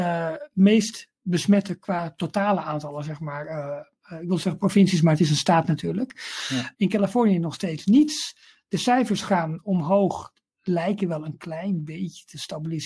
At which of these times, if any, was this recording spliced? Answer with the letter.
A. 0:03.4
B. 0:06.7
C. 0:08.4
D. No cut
B